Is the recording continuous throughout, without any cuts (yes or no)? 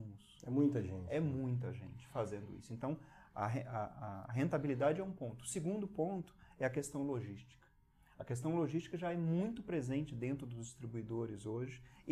yes